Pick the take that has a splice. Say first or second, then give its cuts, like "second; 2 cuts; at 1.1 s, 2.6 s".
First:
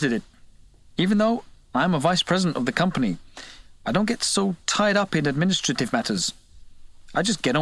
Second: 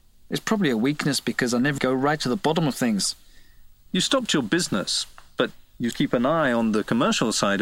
second; 3 cuts; at 1.8 s, 3.9 s, 5.9 s